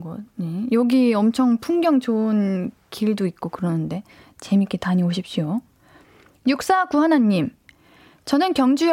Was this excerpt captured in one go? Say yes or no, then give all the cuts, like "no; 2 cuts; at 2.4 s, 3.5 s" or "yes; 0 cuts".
yes; 0 cuts